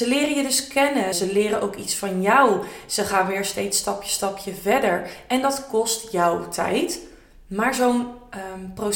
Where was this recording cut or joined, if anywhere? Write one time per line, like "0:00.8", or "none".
0:01.1